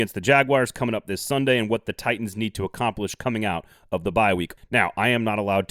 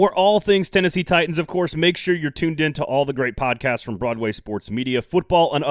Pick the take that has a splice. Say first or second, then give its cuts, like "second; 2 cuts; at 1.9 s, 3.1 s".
first; 1 cut; at 4.6 s